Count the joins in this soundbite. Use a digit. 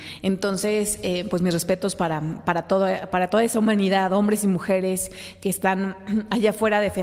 0